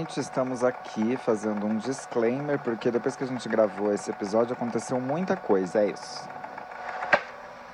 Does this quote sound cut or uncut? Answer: cut